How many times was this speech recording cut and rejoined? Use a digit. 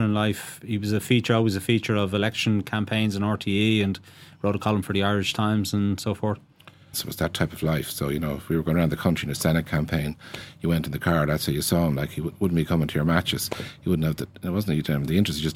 1